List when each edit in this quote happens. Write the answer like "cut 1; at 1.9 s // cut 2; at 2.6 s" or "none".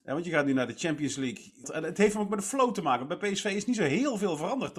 cut 1; at 1.6 s